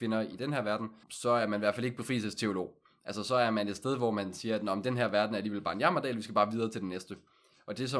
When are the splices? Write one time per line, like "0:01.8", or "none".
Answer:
0:01.0